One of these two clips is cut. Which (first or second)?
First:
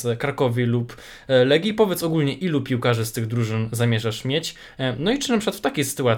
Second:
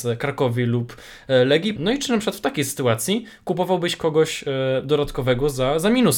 second